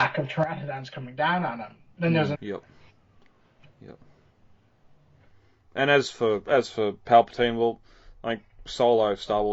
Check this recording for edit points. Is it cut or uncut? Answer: cut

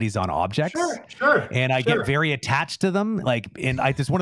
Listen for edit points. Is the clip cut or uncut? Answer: uncut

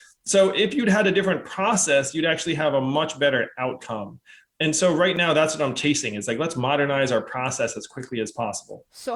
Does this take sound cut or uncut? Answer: uncut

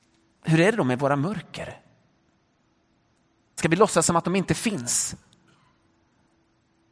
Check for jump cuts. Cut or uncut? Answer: cut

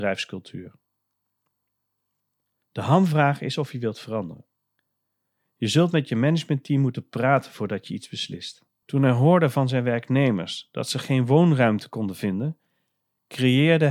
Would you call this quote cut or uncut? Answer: cut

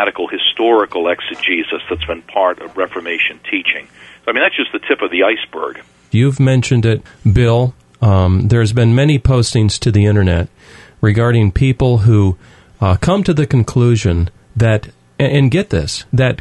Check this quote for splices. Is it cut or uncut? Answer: cut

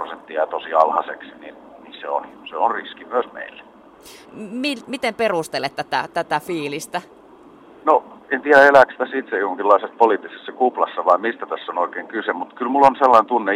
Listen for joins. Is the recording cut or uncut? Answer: cut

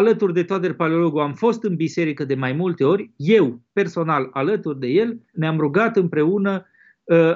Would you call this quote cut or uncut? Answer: cut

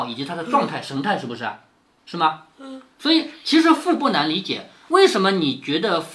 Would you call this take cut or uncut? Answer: uncut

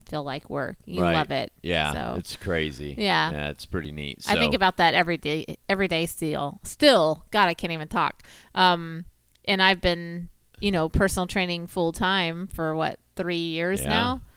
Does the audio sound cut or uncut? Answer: uncut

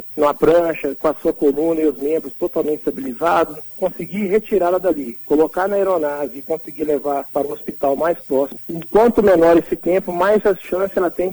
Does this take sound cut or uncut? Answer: cut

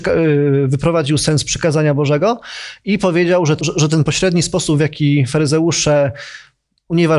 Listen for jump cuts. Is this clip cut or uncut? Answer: cut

